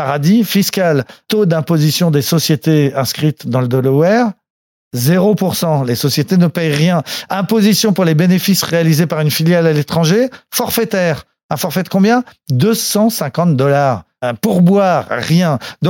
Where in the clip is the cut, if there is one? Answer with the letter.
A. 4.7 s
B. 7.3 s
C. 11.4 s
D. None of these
D